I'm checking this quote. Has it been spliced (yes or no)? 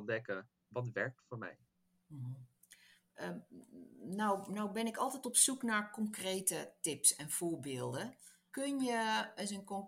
no